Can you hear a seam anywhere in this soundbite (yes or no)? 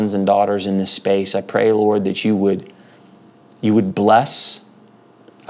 no